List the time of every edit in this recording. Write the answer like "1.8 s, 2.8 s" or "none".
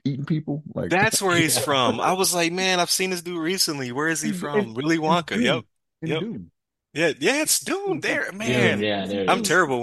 none